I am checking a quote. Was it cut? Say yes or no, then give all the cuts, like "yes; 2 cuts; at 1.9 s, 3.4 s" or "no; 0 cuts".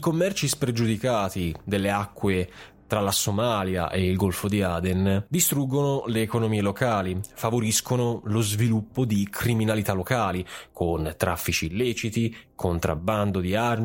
no; 0 cuts